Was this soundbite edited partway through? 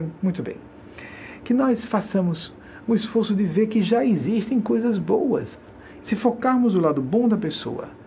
yes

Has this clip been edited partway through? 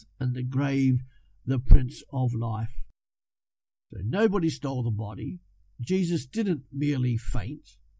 no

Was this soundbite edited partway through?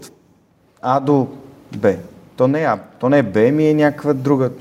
no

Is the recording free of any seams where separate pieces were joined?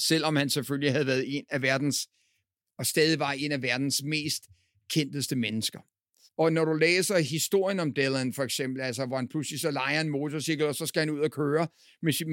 no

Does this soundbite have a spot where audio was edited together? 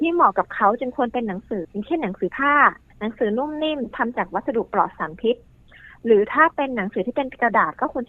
yes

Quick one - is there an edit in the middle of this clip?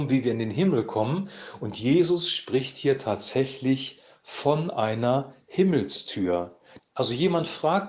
yes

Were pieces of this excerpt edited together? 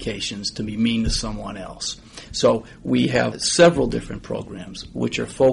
yes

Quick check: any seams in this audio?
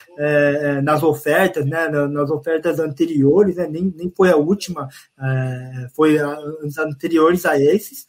no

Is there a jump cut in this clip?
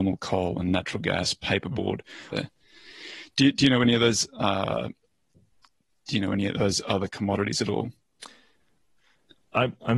yes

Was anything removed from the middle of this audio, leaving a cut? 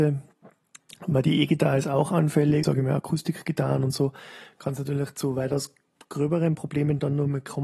yes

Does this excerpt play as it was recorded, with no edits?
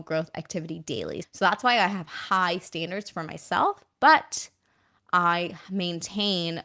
no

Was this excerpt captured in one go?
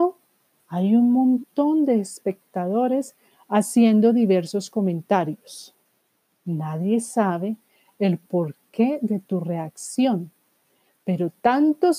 yes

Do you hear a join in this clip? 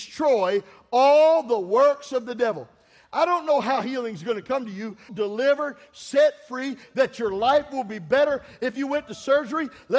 yes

